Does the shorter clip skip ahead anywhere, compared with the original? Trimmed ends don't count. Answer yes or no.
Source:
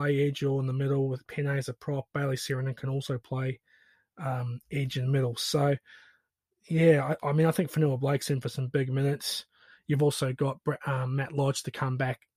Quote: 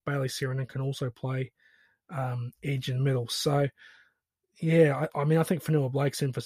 no